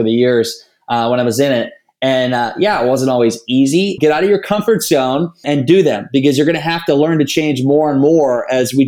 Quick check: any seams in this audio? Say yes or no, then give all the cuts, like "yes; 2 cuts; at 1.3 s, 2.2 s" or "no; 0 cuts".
yes; 2 cuts; at 4.0 s, 5.4 s